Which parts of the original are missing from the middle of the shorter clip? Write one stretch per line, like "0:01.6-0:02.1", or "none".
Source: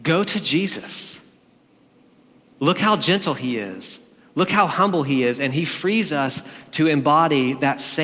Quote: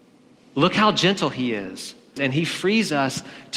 0:04.2-0:05.4